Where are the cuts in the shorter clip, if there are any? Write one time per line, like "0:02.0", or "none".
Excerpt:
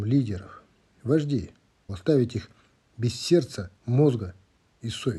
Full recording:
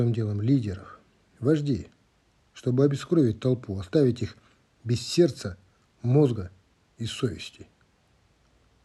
0:01.9
0:03.8